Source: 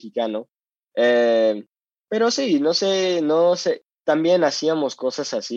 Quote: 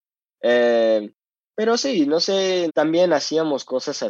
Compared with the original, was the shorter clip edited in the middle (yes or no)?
yes